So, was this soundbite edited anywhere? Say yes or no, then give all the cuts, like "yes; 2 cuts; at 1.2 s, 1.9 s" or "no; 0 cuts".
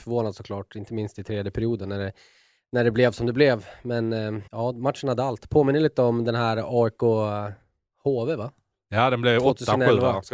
yes; 1 cut; at 4.5 s